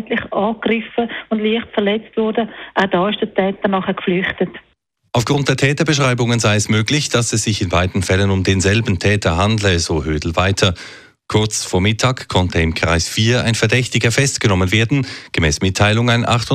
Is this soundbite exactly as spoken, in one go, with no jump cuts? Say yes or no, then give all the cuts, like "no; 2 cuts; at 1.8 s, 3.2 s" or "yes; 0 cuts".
yes; 0 cuts